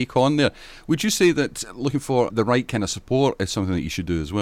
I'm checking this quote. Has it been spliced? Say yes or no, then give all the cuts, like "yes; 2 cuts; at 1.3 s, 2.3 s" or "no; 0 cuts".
yes; 1 cut; at 2.3 s